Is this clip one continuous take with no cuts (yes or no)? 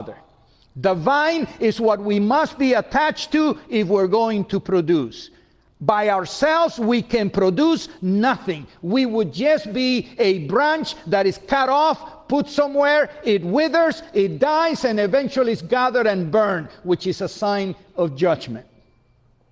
yes